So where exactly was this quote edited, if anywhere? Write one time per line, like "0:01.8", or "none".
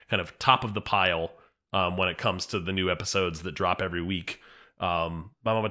none

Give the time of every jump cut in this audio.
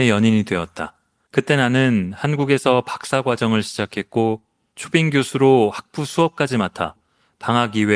0:01.3

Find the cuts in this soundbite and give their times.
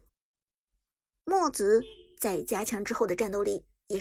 none

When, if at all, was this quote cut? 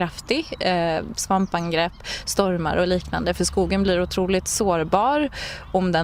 0:01.1

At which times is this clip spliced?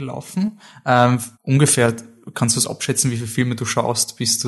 0:01.3

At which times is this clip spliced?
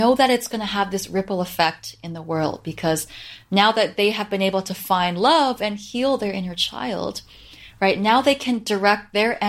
none

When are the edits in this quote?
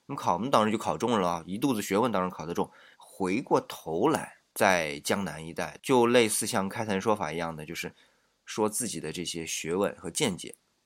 0:02.9

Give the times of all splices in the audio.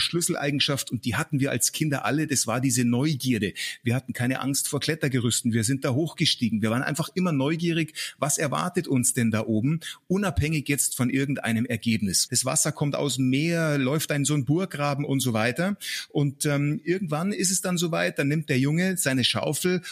0:12.3

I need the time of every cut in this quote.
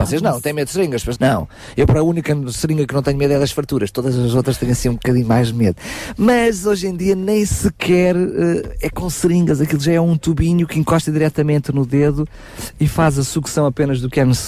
0:01.2

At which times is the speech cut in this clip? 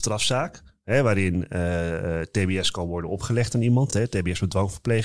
none

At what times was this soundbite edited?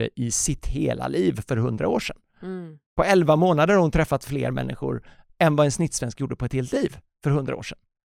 none

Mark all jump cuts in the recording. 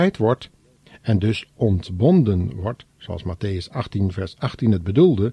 none

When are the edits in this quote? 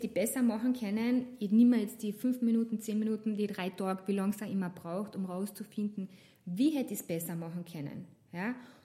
none

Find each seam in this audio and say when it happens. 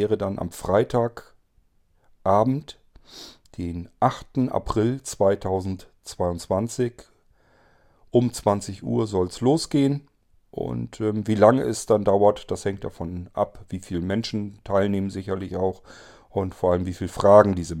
none

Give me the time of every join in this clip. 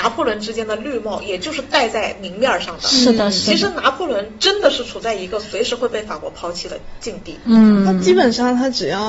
none

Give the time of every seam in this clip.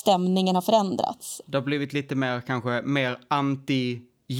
0:01.4

